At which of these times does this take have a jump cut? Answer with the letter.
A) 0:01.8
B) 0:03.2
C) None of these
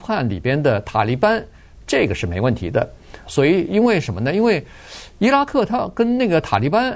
B